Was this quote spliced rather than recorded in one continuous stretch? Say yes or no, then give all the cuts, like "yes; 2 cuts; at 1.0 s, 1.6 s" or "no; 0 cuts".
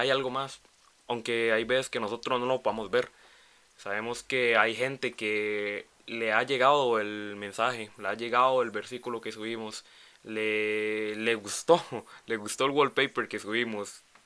no; 0 cuts